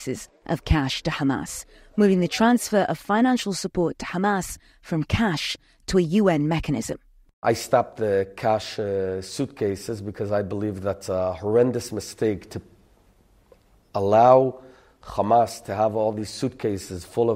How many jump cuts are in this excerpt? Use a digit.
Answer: 0